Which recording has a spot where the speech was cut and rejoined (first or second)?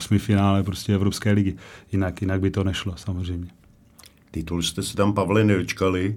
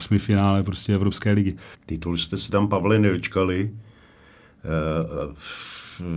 second